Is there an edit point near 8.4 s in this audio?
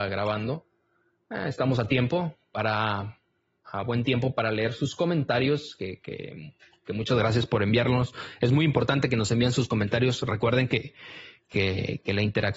no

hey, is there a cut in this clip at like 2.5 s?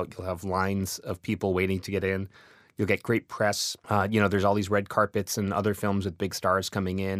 no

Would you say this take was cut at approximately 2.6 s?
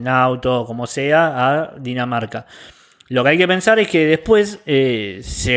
no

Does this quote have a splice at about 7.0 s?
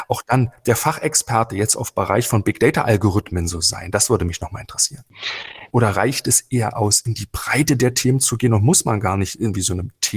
no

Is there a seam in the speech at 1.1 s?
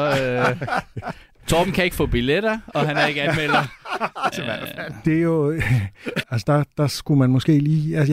no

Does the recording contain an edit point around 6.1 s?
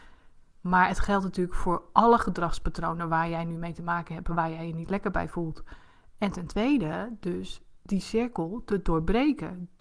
yes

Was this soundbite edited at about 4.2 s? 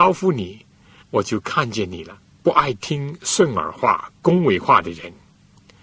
no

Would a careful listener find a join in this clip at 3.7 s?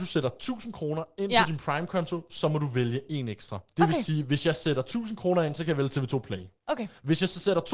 yes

